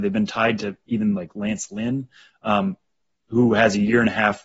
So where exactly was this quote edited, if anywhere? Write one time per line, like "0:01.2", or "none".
none